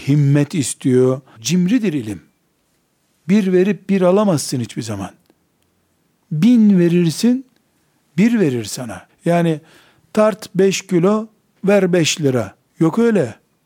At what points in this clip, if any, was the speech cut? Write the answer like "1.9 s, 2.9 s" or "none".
1.4 s, 9.1 s